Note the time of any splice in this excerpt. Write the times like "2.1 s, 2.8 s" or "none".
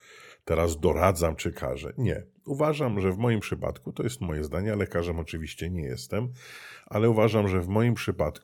none